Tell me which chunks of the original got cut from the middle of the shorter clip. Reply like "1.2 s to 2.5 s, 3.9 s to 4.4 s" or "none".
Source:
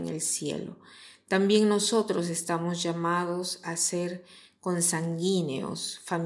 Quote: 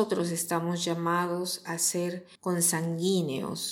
4.3 s to 4.6 s